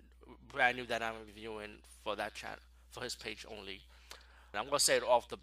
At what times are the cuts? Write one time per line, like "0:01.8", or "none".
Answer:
0:04.5